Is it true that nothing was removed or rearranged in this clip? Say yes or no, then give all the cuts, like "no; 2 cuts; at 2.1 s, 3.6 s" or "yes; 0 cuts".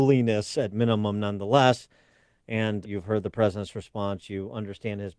no; 1 cut; at 2.8 s